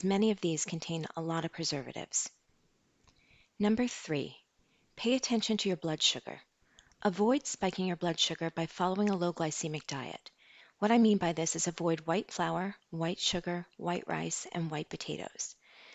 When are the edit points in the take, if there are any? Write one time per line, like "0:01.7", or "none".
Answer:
0:10.6